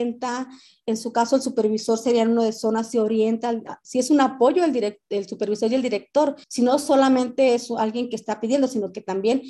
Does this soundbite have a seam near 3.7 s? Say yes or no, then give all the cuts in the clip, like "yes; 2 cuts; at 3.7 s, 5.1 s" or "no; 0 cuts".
yes; 2 cuts; at 3.7 s, 6.4 s